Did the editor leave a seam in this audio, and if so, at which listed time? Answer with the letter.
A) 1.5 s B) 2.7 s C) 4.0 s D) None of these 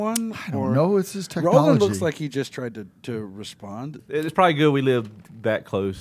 C